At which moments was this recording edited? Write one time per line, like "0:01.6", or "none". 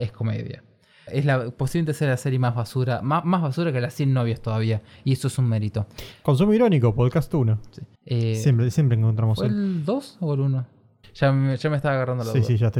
0:01.1
0:07.9
0:11.0